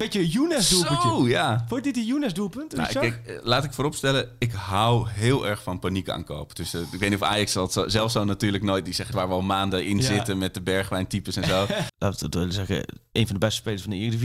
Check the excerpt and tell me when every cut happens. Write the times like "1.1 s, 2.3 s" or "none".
9.1 s, 11.9 s